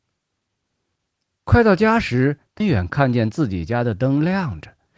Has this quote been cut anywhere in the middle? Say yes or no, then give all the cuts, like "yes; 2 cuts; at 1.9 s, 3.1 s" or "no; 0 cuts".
yes; 2 cuts; at 1.4 s, 2.6 s